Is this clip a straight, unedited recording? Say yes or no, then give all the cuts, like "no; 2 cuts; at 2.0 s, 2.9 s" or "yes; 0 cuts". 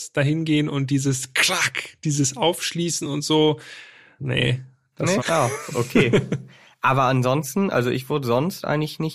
no; 2 cuts; at 4.2 s, 5.2 s